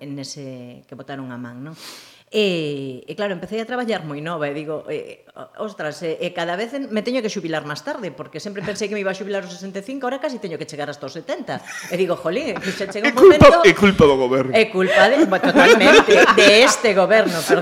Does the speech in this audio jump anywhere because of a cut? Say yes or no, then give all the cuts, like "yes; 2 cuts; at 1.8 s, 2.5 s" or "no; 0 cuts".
no; 0 cuts